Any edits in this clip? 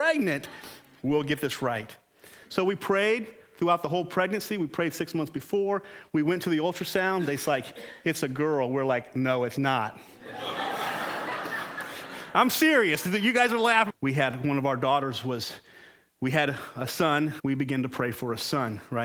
yes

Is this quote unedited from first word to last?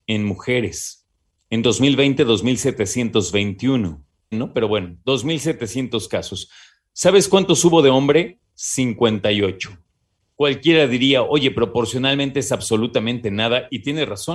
no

